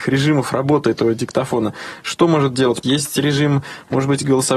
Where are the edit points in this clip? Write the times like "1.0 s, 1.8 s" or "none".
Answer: 2.8 s